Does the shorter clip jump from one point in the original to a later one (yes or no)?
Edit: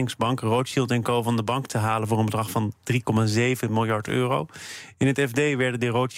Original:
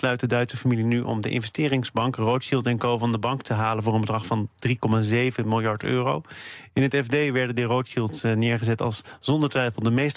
no